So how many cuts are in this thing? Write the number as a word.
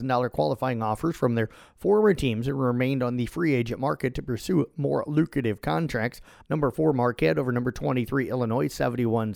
one